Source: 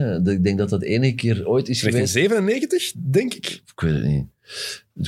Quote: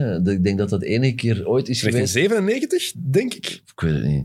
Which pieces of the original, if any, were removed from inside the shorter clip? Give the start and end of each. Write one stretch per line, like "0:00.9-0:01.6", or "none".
none